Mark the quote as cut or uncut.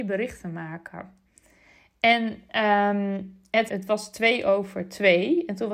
cut